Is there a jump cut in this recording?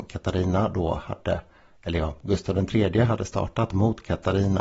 no; 0 cuts

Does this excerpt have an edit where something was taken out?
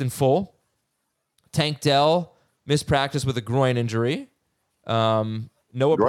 no; 0 cuts

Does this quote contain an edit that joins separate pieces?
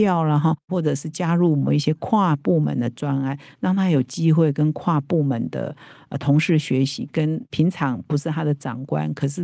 no; 0 cuts

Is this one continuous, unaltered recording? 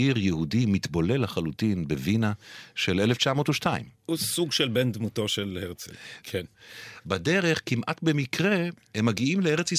no; 1 cut; at 6.2 s

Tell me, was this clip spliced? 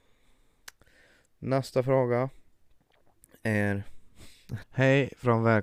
yes; 1 cut; at 4.6 s

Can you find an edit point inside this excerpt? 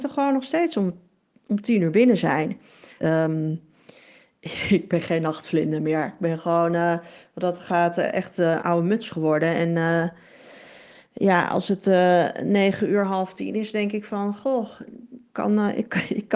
yes; 2 cuts; at 3.0 s, 8.6 s

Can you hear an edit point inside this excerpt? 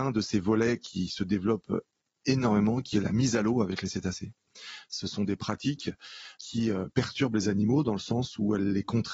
yes; 1 cut; at 6.3 s

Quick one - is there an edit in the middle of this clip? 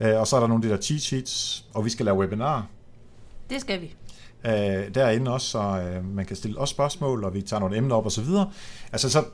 no; 0 cuts

